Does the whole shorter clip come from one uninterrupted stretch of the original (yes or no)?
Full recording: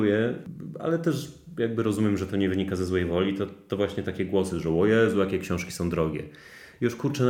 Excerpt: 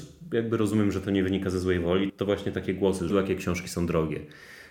no